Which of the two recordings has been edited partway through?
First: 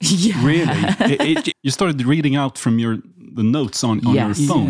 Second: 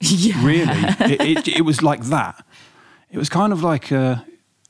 first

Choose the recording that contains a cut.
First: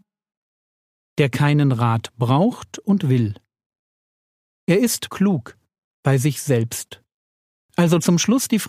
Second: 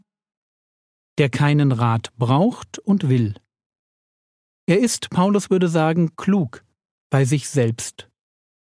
first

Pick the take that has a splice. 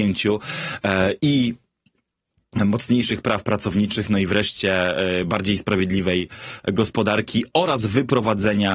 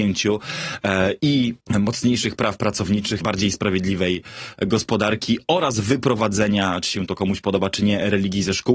second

